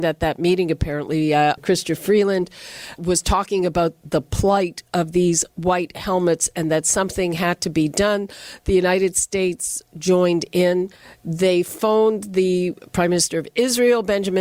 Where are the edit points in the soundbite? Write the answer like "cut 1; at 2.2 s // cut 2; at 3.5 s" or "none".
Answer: cut 1; at 1.6 s // cut 2; at 3.0 s